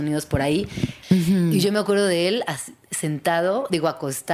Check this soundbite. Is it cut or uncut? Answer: cut